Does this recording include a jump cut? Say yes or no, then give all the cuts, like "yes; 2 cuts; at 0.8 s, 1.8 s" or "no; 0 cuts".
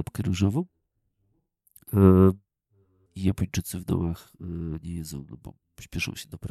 yes; 1 cut; at 3.1 s